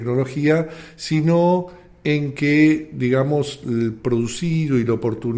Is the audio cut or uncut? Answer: uncut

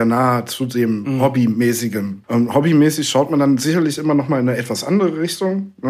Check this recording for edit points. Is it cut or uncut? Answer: cut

